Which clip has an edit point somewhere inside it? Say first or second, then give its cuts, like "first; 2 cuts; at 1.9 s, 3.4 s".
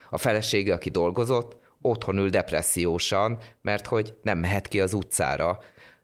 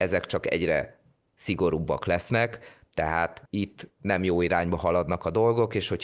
second; 1 cut; at 3.5 s